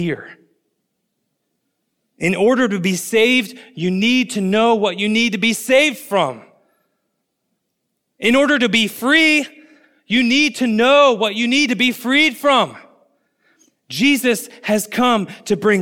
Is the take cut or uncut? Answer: uncut